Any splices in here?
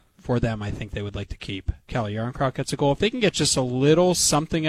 yes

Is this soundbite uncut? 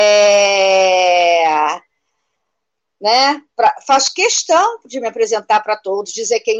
yes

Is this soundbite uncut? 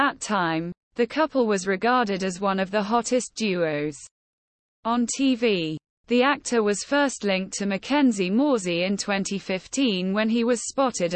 yes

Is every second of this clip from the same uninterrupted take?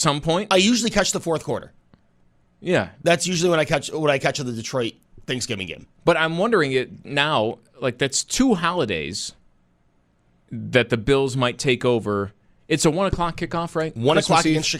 yes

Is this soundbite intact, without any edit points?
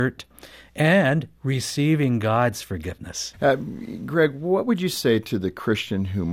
no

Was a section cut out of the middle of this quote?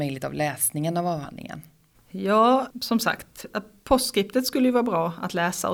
yes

